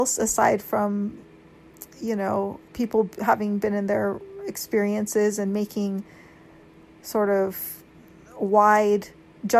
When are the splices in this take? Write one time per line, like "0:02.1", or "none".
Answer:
0:02.7